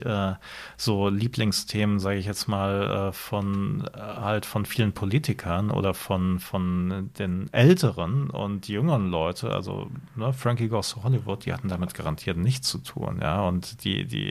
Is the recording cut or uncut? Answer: uncut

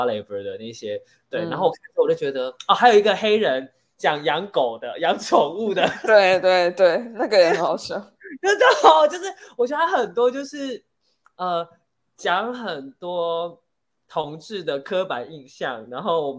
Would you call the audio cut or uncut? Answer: uncut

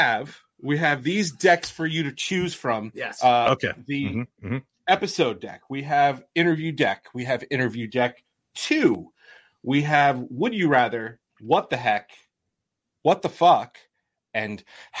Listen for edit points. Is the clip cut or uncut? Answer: cut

